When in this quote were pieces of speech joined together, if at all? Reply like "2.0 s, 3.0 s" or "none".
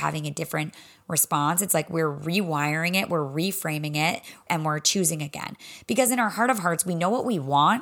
4.5 s